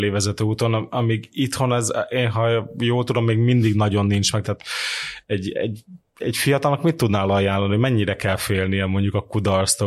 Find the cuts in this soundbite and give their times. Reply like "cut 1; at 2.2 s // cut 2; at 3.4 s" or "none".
cut 1; at 4.4 s